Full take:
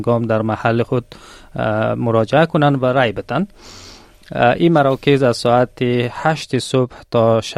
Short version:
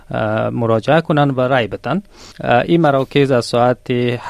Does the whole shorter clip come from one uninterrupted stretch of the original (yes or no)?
no